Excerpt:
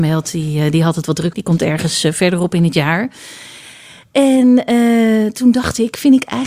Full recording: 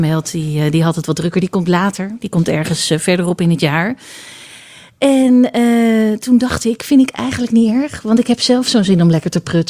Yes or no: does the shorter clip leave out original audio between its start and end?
yes